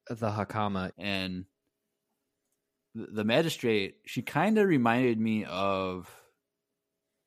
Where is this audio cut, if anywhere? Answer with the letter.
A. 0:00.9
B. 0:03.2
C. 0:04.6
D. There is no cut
A